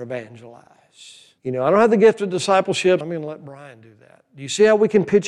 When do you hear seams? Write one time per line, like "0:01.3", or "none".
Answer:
0:01.4
0:03.0